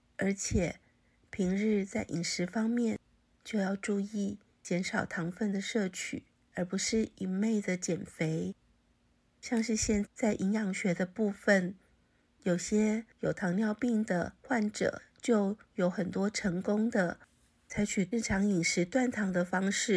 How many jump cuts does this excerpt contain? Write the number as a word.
two